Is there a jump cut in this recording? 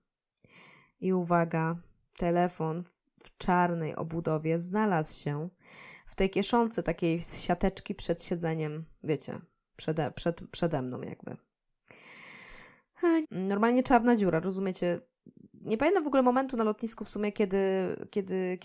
yes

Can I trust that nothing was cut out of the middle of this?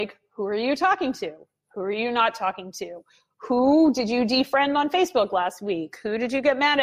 yes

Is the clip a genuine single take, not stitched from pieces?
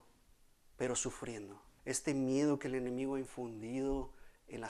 no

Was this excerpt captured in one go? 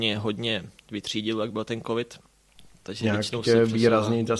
yes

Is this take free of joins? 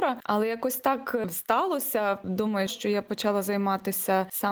no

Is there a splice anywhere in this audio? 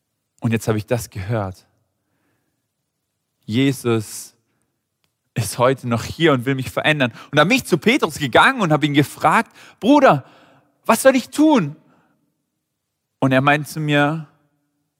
no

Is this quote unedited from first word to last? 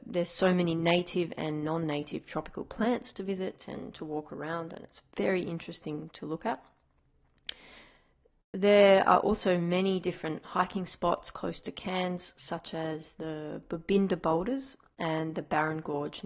yes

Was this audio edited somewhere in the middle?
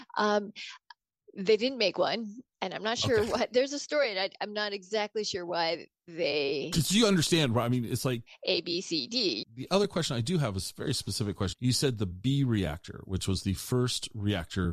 yes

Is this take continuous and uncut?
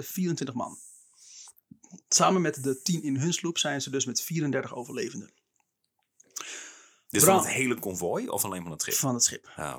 yes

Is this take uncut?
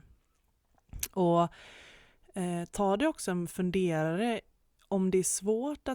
yes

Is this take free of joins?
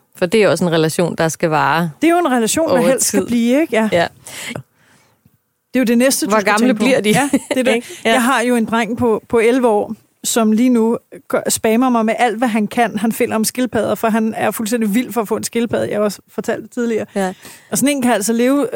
no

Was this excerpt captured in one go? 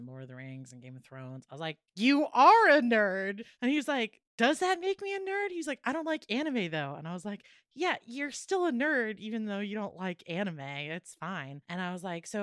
yes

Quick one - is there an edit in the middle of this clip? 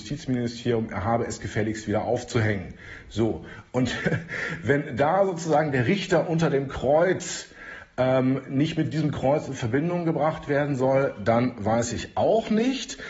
no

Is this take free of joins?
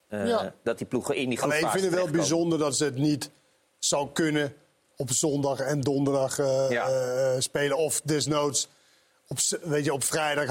yes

